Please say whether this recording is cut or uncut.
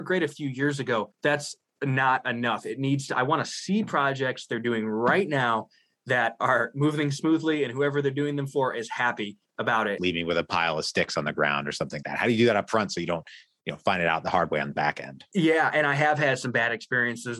cut